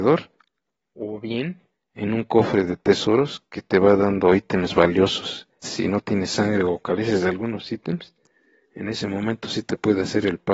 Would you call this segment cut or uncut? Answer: cut